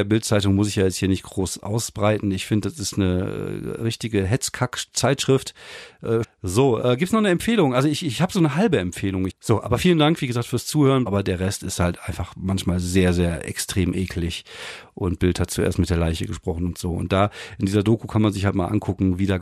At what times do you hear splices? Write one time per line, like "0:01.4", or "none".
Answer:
0:06.2
0:09.3
0:11.1

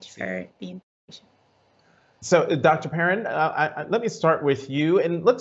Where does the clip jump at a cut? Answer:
none

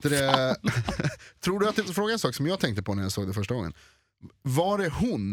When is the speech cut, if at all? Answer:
0:01.9

